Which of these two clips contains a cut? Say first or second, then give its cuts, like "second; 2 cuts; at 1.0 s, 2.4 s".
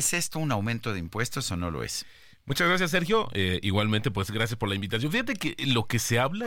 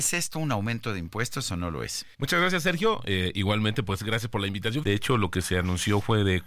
second; 2 cuts; at 2.1 s, 4.8 s